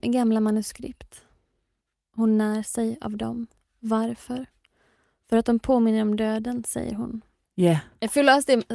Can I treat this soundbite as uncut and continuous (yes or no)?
no